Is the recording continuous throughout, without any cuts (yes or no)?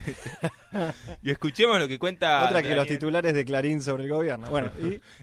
yes